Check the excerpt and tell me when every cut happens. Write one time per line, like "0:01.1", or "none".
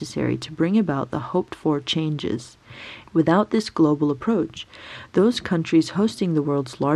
0:03.1

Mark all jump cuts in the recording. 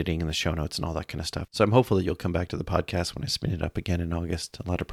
0:01.5

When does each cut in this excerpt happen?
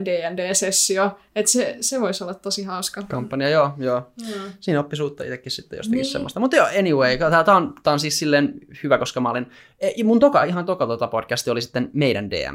none

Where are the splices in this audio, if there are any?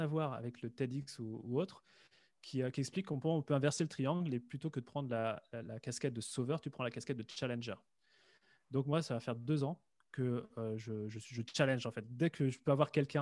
none

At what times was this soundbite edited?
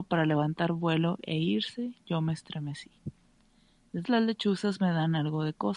0:04.0

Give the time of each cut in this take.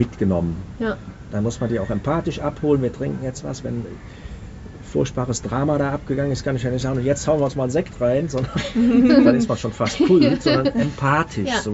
none

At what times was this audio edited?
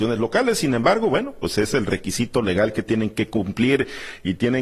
none

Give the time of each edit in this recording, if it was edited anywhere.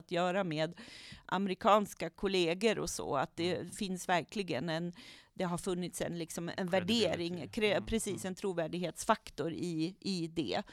none

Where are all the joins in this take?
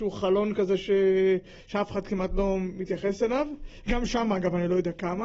none

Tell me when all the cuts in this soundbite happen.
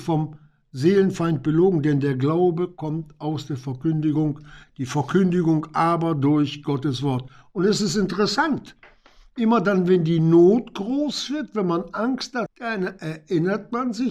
0:12.5

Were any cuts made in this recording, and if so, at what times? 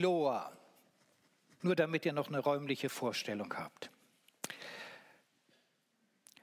0:01.6

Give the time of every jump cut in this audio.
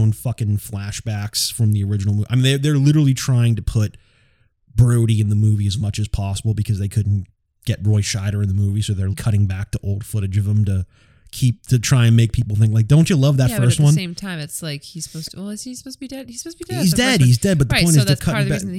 0:09.1

